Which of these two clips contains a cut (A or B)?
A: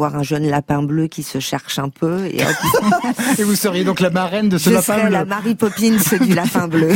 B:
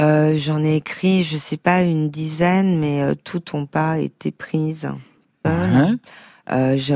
B